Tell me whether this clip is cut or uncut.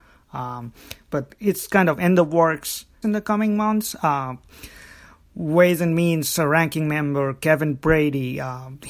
cut